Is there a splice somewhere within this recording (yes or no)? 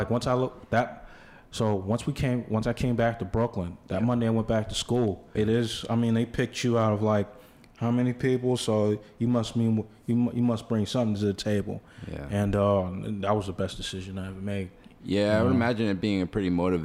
yes